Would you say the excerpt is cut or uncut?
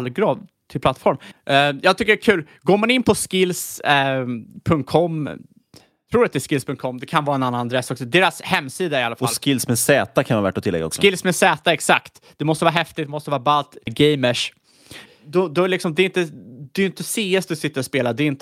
cut